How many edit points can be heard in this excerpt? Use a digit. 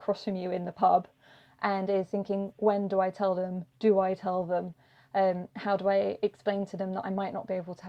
0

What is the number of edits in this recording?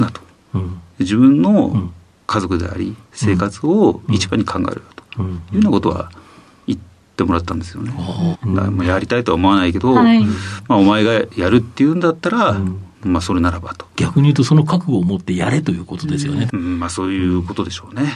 3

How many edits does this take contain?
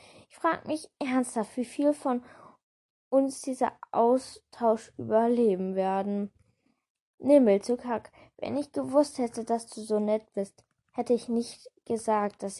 0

